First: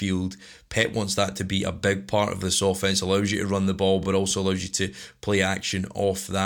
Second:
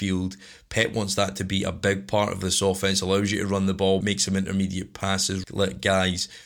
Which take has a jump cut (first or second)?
second